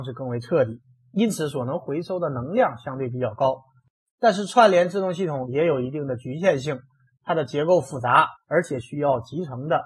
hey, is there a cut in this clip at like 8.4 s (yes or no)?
yes